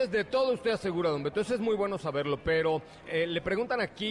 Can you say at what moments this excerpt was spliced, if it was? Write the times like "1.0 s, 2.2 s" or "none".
3.0 s